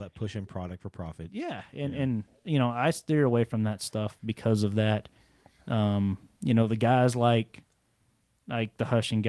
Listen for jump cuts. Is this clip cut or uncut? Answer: uncut